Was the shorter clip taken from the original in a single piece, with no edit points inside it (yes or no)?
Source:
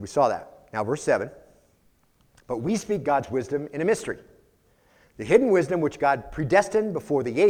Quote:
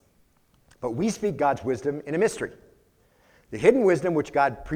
yes